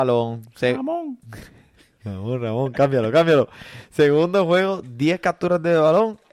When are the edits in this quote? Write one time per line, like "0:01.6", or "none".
none

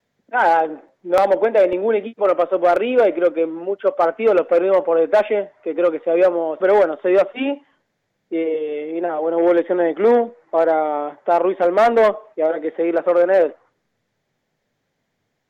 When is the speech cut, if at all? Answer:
0:06.6

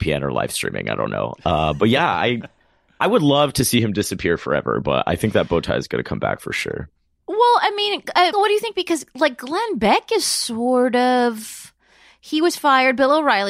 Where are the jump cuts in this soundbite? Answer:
0:08.3

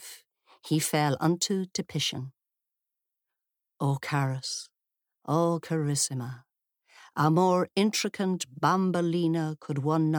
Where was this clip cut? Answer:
none

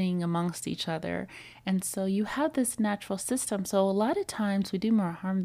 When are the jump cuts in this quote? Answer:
none

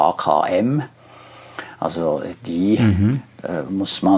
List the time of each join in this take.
none

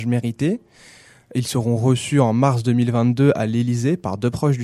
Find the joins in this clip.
none

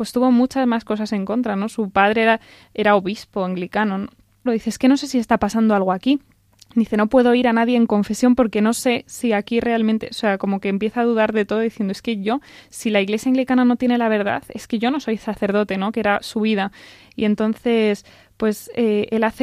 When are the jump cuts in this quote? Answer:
0:04.5

